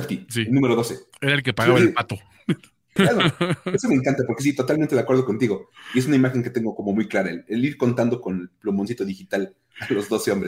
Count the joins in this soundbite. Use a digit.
1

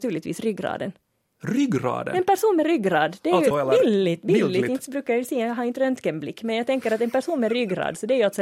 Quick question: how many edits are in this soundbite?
1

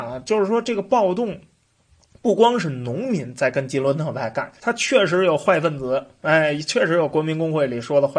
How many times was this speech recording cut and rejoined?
1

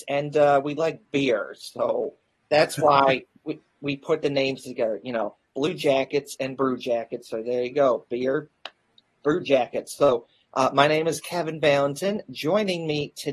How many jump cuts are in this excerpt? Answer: 0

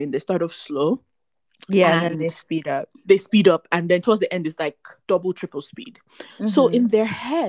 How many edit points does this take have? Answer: 1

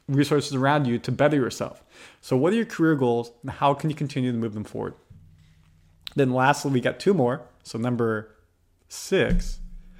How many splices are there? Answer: 0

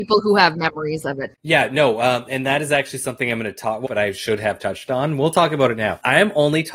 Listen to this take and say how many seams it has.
1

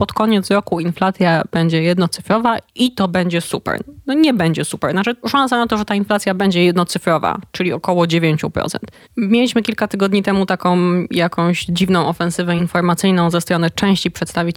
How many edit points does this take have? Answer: 1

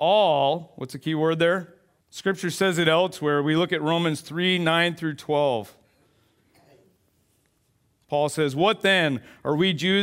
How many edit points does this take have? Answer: 1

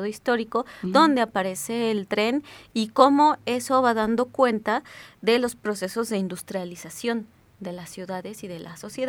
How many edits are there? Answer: 0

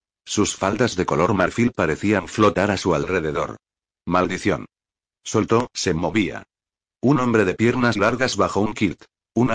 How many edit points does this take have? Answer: 2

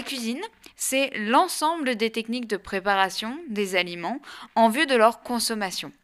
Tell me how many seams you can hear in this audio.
0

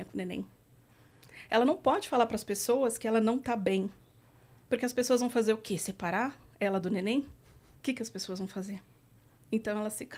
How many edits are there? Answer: 0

